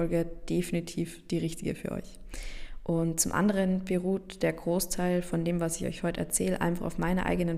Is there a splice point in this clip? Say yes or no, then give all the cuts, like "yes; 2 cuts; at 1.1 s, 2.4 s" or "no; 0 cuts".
no; 0 cuts